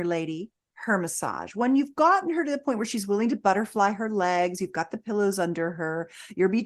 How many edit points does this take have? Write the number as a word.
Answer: zero